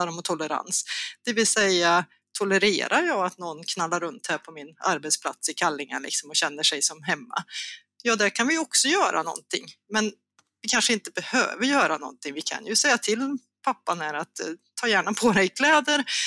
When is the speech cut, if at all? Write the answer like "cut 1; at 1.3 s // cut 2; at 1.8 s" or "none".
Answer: none

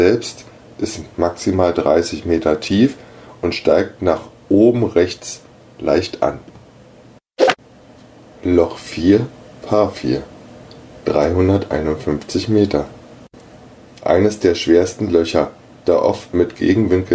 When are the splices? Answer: none

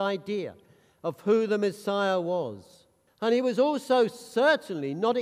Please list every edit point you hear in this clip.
cut 1; at 3.1 s

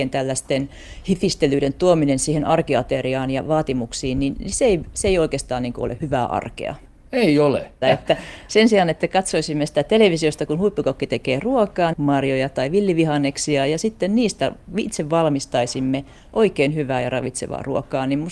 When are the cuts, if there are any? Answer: cut 1; at 6.0 s // cut 2; at 7.8 s // cut 3; at 11.9 s

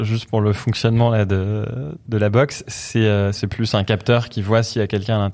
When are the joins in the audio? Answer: cut 1; at 3.3 s

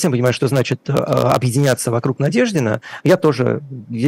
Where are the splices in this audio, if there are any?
cut 1; at 3.0 s

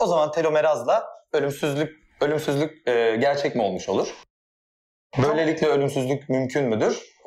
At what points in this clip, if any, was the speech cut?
none

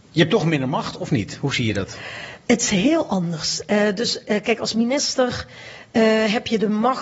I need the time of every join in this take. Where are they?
none

